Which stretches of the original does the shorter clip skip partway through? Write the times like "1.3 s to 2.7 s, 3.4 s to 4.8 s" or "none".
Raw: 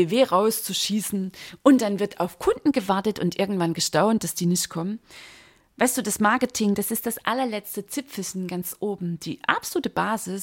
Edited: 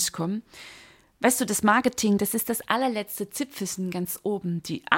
none

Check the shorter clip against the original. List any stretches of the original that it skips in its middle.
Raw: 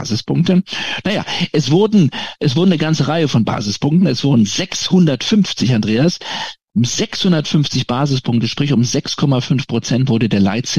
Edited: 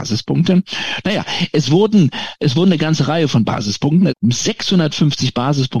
4.1 s to 6.6 s

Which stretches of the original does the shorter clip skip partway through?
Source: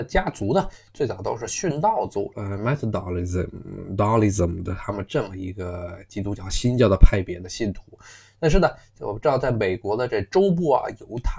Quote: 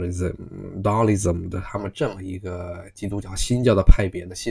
none

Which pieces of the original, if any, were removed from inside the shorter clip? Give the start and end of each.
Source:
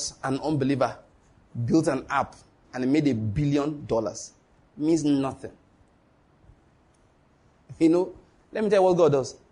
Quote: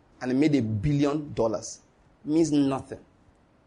none

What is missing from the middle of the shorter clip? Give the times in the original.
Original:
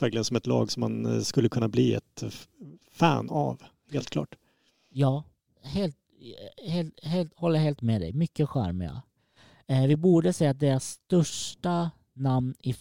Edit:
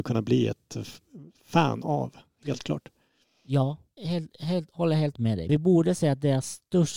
5.4 s to 6.6 s, 8.1 s to 9.9 s

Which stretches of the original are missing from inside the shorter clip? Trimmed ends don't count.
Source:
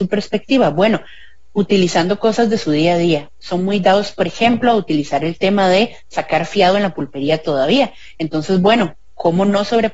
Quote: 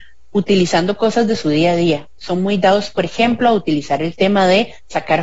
none

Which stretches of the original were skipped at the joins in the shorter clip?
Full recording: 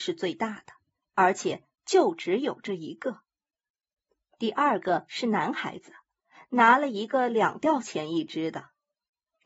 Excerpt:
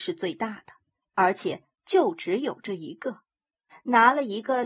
3.7 s to 6.3 s

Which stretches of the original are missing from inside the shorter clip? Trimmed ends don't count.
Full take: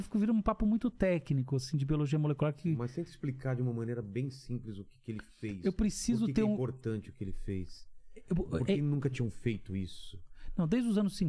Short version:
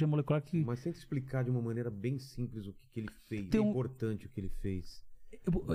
5.6 s to 6.3 s

